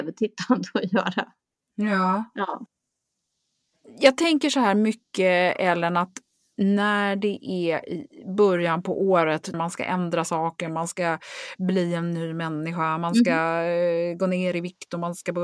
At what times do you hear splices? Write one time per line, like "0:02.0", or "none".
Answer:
0:09.5